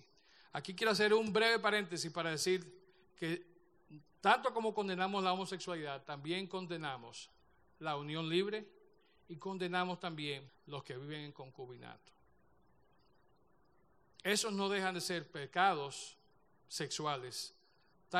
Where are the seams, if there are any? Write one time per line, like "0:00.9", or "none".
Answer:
0:10.5